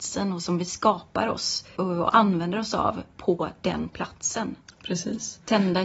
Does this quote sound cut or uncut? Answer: cut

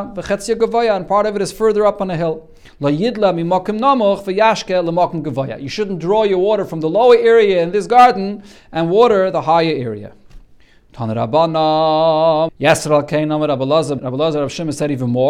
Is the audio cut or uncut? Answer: cut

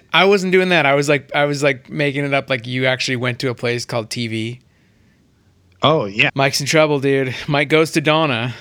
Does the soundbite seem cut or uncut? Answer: cut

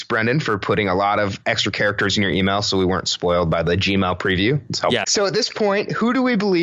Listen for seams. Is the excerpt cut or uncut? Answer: cut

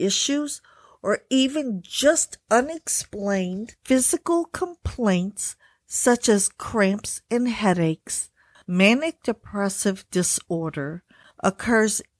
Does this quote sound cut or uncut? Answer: cut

